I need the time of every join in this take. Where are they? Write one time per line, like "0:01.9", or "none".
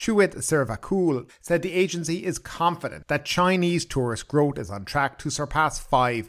0:01.3